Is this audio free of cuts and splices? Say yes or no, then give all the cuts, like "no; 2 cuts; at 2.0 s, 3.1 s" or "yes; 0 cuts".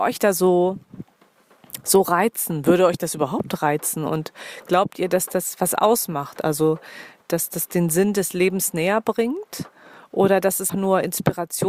no; 1 cut; at 10.7 s